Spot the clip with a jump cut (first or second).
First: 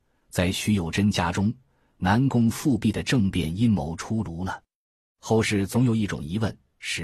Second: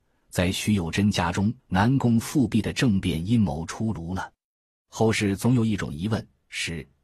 second